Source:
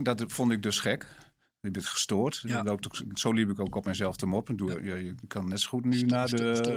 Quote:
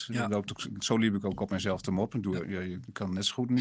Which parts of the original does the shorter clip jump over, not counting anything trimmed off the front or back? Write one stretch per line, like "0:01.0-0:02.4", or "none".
none